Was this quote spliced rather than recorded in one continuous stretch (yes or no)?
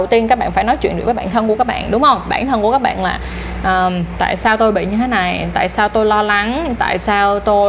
no